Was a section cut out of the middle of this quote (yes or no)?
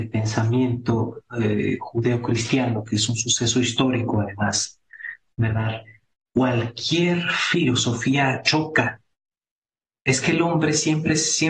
no